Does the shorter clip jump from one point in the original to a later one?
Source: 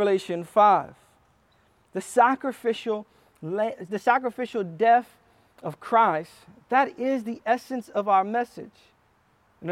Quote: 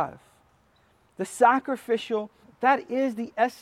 yes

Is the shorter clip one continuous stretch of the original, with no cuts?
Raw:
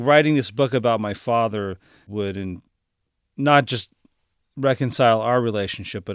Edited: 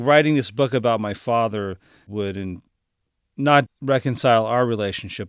no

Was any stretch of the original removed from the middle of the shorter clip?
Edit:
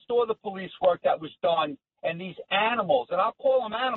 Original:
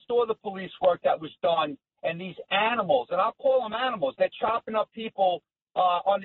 no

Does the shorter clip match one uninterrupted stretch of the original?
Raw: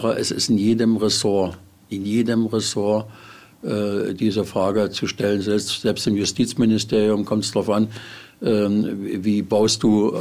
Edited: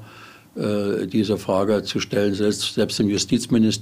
yes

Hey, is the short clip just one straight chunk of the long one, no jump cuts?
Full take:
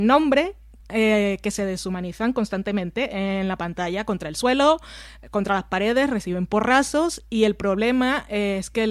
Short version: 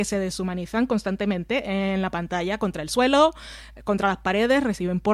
yes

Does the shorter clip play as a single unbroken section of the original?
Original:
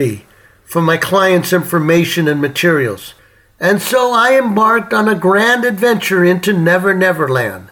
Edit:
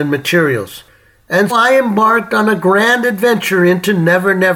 no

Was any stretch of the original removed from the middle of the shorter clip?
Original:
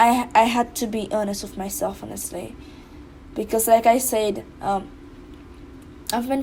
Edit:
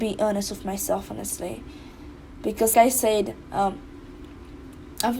yes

